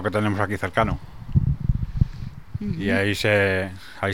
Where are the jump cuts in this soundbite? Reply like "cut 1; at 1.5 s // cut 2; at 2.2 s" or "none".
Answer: none